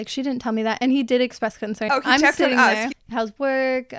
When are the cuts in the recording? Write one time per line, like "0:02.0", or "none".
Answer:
0:01.9
0:02.9